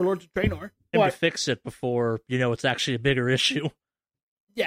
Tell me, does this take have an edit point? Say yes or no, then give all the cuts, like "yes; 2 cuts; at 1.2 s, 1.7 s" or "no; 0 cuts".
yes; 1 cut; at 0.9 s